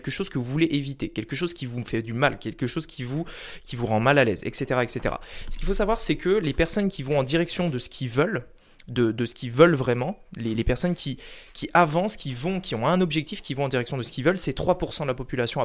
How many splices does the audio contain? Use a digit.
0